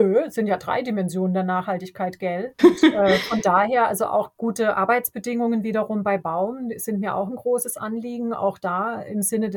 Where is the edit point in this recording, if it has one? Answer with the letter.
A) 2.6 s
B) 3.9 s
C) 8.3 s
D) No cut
A